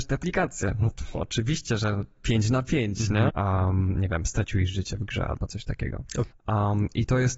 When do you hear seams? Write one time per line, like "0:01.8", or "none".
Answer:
0:03.3
0:06.3